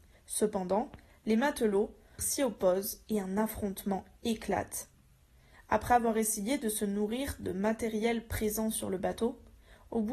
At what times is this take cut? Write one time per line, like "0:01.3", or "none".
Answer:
0:02.2
0:05.5